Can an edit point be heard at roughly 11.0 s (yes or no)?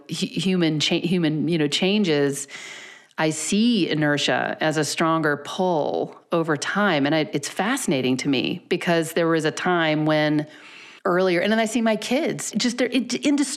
yes